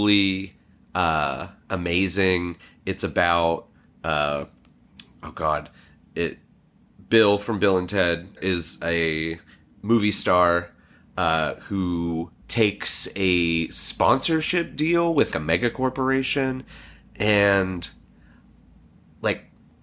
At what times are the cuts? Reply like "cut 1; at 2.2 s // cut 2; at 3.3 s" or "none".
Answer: cut 1; at 8.4 s // cut 2; at 12.4 s // cut 3; at 15.3 s